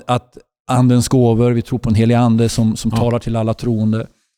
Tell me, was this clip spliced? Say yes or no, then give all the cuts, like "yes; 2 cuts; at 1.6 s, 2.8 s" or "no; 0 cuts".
no; 0 cuts